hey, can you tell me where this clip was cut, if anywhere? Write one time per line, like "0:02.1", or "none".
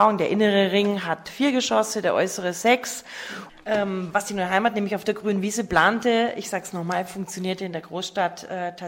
0:03.5